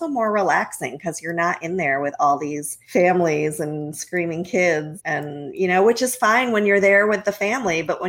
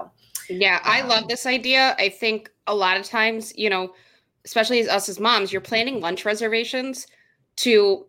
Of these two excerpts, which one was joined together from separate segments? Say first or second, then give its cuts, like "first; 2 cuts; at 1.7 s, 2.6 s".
first; 2 cuts; at 2.8 s, 5.0 s